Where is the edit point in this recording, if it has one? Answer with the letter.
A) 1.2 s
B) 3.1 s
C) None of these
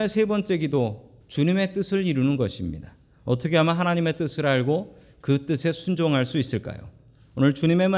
A